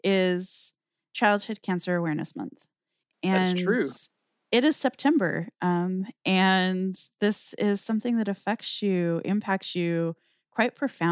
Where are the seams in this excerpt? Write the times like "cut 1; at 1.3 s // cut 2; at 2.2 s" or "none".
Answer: none